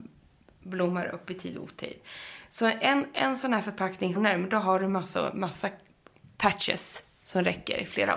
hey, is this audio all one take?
no; 1 cut; at 4.1 s

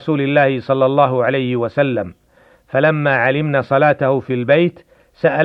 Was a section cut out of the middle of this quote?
no; 0 cuts

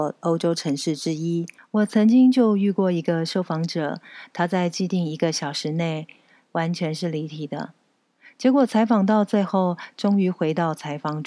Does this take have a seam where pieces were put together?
yes; 1 cut; at 1.6 s

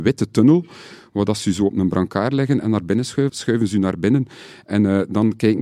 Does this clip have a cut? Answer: yes; 1 cut; at 3.3 s

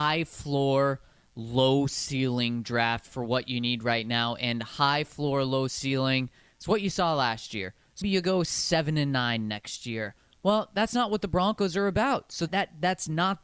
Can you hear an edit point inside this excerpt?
yes; 2 cuts; at 8.0 s, 12.5 s

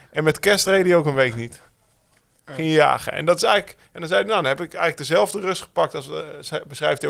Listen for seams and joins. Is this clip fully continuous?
yes; 0 cuts

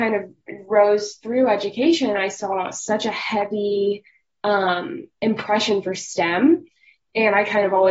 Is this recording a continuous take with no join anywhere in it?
yes; 0 cuts

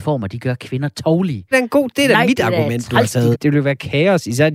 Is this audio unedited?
no; 2 cuts; at 1.5 s, 3.3 s

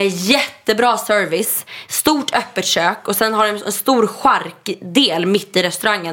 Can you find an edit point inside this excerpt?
no; 0 cuts

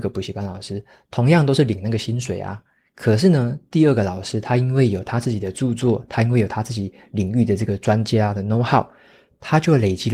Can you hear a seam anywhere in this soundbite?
no; 0 cuts

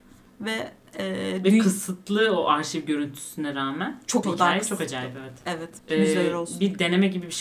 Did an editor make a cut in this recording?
yes; 2 cuts; at 4.2 s, 5.8 s

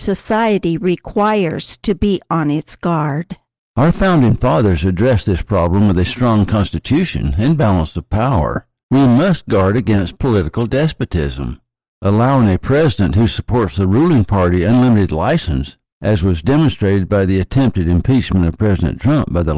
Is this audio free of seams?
no; 2 cuts; at 8.8 s, 15.8 s

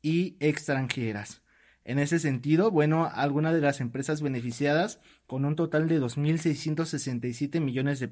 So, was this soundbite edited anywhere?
no; 0 cuts

